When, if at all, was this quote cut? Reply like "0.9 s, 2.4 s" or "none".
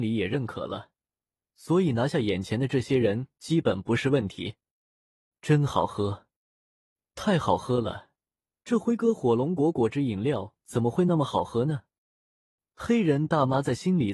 none